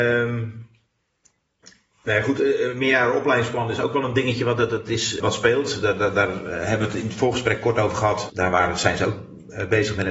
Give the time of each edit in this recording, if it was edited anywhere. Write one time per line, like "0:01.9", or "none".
0:05.2
0:08.3